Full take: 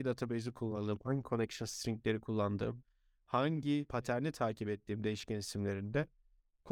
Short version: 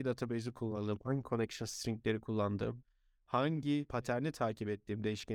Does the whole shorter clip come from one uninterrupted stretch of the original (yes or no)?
yes